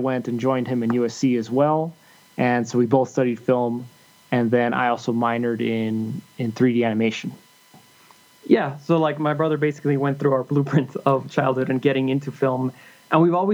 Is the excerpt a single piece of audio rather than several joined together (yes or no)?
yes